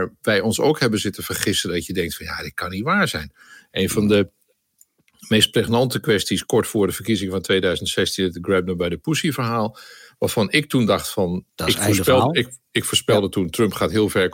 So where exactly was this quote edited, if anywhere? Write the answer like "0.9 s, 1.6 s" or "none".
11.5 s